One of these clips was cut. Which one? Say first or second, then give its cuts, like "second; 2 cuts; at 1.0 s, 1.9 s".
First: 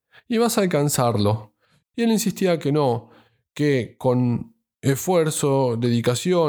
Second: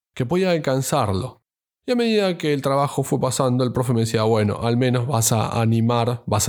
first; 1 cut; at 1.8 s